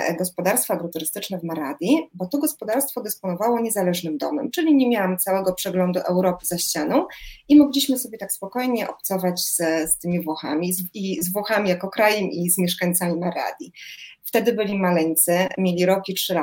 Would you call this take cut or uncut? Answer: cut